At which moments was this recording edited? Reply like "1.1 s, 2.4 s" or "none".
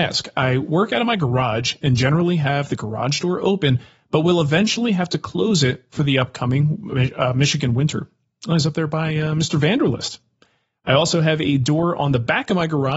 none